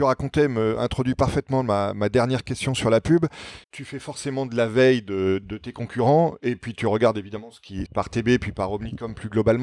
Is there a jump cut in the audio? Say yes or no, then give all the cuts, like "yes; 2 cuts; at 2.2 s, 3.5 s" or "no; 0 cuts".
yes; 3 cuts; at 3.6 s, 5.4 s, 7.9 s